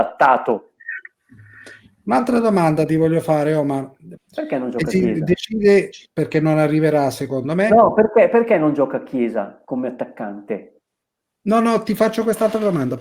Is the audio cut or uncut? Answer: cut